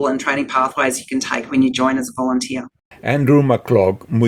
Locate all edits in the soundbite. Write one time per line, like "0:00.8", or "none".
none

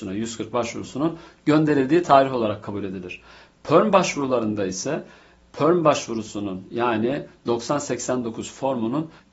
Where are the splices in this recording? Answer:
none

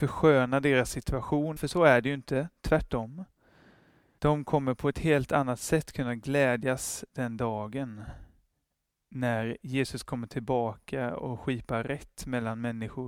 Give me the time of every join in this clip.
0:01.6
0:04.2

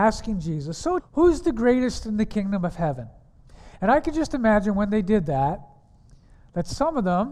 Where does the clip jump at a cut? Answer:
0:01.0

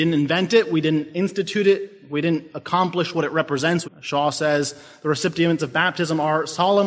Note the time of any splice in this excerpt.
0:03.8
0:05.6

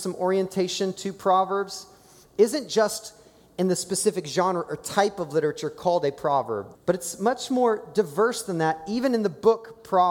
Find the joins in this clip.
0:06.7

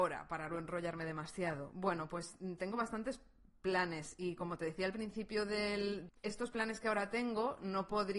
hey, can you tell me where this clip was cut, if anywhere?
0:06.1

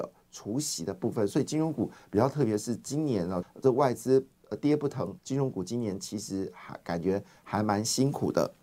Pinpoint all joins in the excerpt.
0:03.4
0:05.2

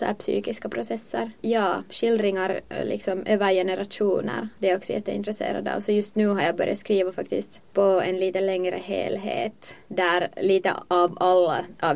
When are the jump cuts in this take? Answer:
0:04.5

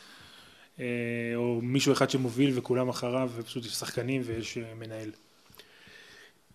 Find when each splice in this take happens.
none

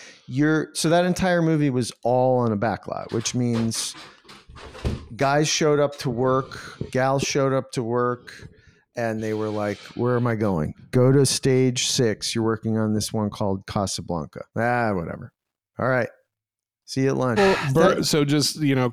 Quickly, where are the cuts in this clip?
0:14.5
0:17.4

